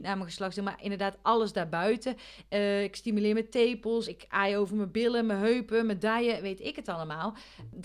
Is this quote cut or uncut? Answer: uncut